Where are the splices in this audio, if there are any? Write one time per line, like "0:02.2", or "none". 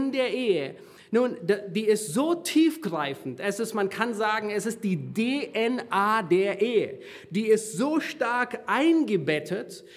none

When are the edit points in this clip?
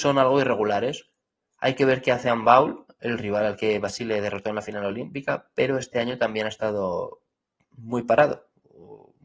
none

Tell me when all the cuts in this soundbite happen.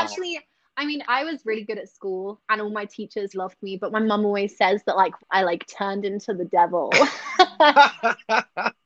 0:01.0
0:03.3
0:05.2

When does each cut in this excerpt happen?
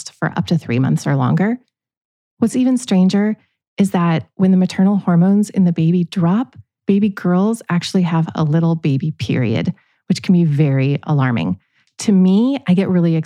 none

